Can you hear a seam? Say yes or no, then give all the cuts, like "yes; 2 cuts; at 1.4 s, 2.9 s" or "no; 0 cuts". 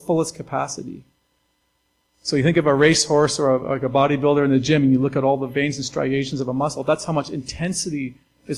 no; 0 cuts